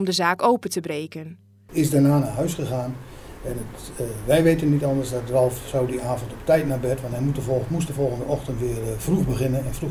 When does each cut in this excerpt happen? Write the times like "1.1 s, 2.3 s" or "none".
1.7 s